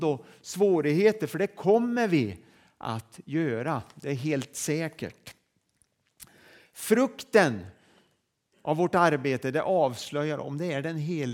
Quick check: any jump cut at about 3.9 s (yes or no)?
no